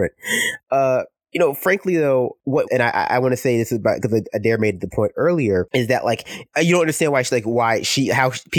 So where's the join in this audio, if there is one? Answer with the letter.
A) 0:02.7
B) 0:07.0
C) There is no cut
A